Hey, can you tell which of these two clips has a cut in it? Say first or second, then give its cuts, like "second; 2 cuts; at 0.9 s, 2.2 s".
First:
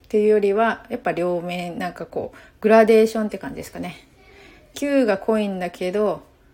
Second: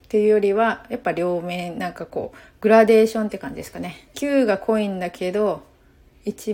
second; 1 cut; at 4.1 s